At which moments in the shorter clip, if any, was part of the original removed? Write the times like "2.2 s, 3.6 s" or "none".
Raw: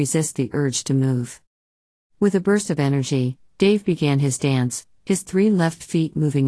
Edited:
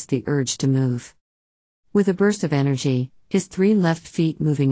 3.2 s